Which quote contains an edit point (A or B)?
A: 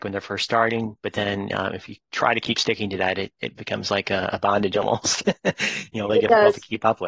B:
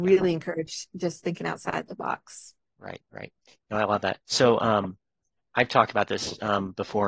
A